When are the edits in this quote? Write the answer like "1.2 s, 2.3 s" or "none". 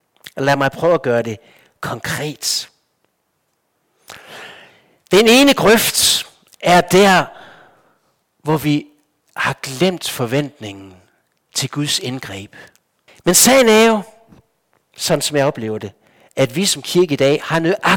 13.1 s